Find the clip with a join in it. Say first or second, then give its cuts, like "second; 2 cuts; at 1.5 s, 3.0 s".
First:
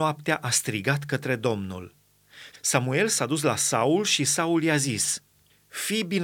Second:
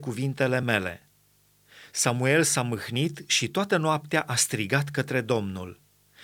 first; 1 cut; at 2.5 s